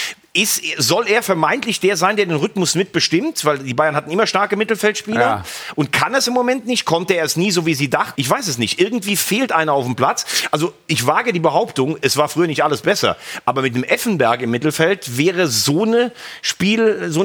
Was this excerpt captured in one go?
no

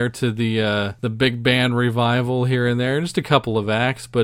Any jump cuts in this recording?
yes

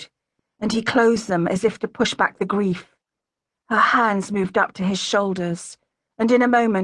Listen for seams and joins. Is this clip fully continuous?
no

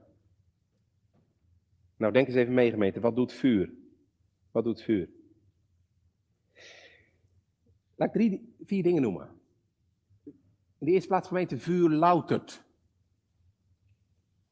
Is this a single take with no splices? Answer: yes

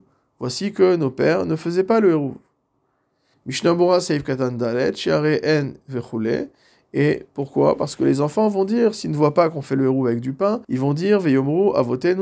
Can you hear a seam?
yes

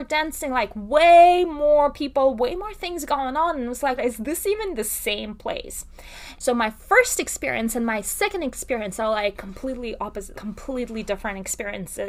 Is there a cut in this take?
yes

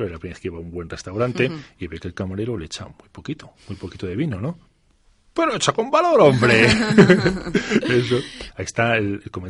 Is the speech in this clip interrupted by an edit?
yes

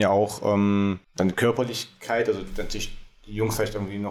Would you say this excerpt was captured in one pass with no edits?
no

